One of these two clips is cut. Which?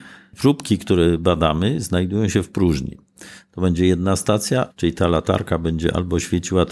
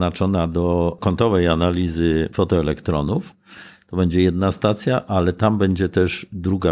first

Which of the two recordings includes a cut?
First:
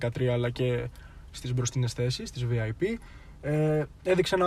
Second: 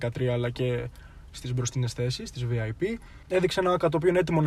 second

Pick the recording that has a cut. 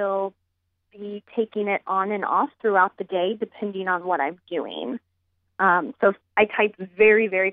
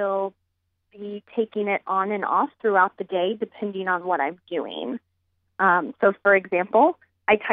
first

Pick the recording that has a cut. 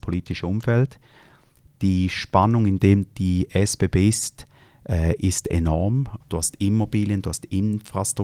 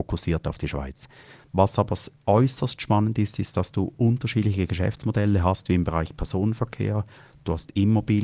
first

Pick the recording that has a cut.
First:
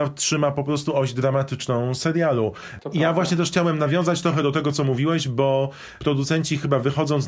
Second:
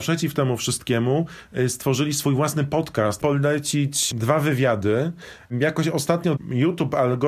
second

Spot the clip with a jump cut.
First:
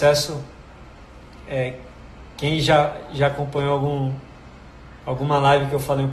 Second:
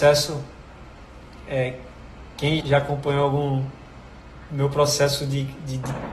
second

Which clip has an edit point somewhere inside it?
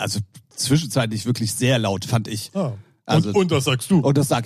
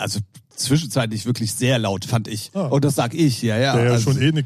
second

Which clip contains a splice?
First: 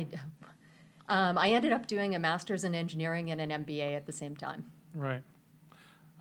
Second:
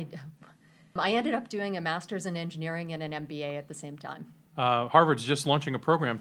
second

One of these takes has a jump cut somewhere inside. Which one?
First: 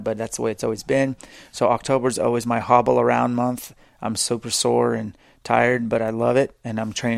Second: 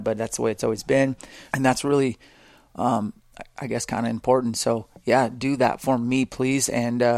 second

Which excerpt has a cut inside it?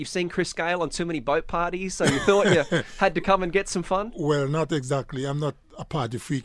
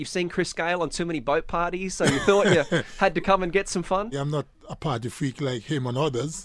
second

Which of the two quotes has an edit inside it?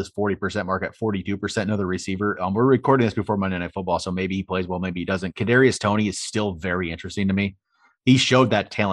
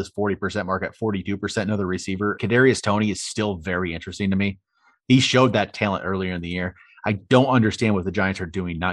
second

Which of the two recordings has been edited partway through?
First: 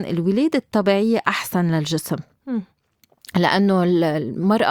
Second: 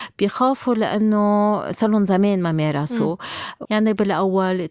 second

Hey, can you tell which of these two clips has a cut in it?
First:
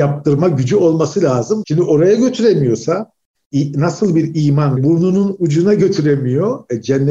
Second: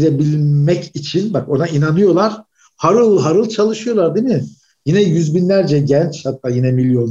first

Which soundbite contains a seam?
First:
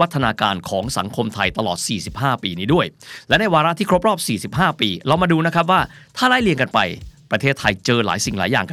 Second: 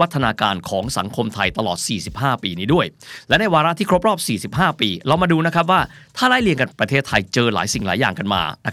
second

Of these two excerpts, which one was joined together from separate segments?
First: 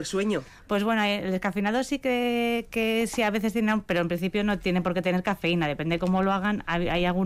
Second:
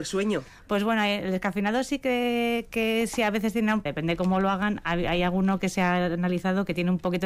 second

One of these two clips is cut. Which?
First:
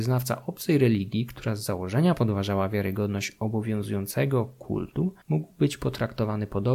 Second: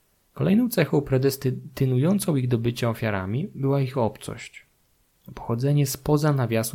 first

